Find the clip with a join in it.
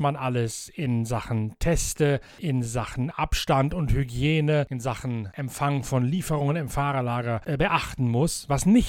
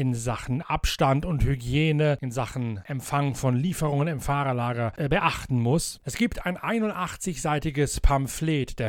second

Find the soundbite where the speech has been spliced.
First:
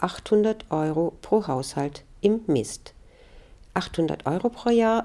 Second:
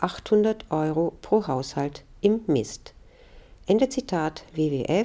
first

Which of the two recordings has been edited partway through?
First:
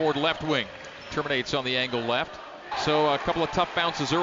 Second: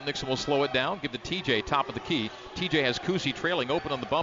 first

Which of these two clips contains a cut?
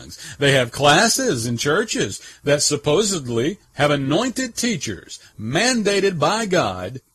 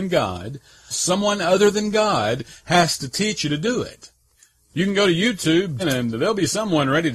second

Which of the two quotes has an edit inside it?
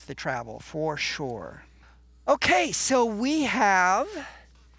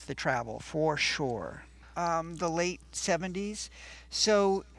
second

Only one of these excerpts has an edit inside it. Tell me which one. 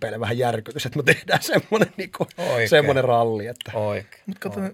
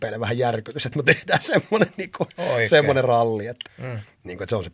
second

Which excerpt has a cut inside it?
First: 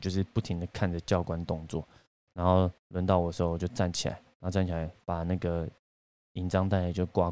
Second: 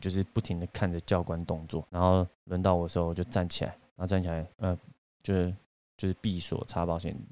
second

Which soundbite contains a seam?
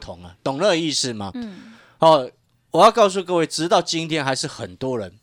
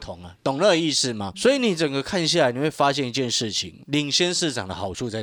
second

